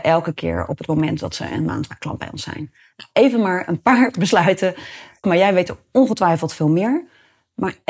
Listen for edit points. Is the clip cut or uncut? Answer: cut